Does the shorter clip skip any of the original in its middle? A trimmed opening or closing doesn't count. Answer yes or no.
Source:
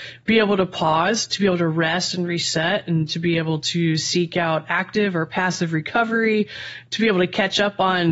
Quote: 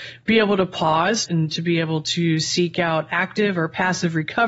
yes